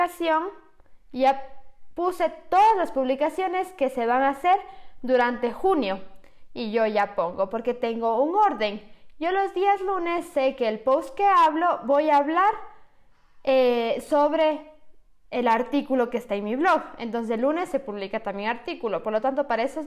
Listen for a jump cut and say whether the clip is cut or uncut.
uncut